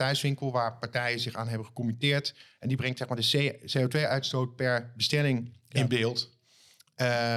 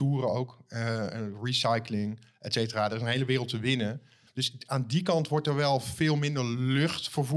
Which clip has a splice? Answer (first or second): second